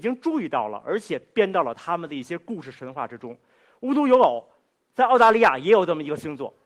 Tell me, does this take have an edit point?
no; 0 cuts

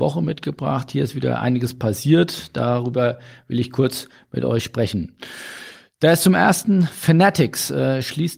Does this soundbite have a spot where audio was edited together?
no; 0 cuts

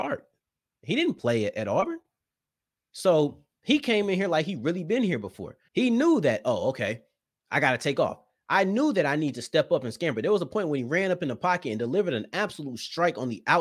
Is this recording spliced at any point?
yes; 1 cut; at 5.7 s

